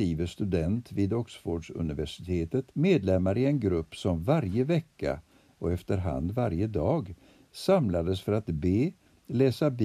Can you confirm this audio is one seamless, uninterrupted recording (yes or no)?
no